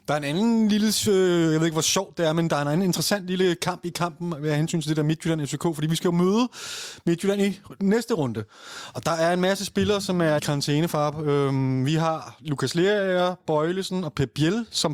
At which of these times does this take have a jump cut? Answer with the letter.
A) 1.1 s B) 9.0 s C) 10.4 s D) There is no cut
C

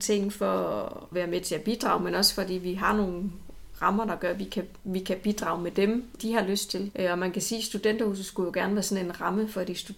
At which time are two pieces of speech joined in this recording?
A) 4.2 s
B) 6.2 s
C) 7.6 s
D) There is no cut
B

